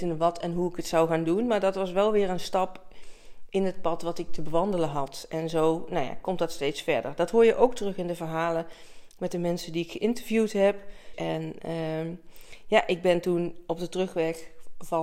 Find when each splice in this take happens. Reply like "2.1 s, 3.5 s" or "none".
11.1 s